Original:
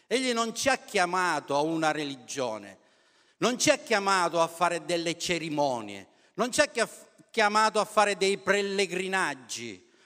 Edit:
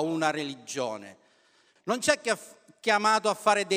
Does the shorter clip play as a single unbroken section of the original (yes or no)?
no